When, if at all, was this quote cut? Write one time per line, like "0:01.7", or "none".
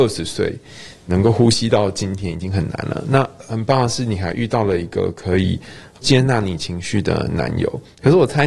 none